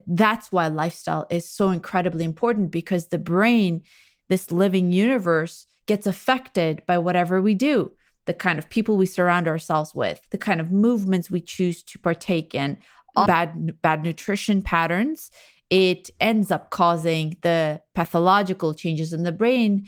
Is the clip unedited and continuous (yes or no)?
no